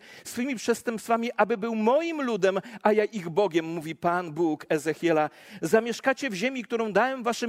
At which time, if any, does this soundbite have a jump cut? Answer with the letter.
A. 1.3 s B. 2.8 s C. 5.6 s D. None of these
D